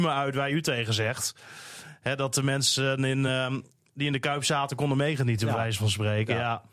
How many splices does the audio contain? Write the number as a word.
zero